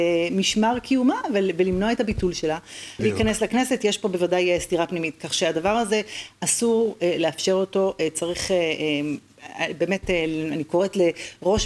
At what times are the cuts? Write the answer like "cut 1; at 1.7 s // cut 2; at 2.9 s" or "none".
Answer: cut 1; at 3.0 s